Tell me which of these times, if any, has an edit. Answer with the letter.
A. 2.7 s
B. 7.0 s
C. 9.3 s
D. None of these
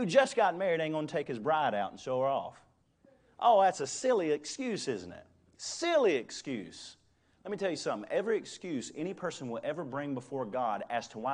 D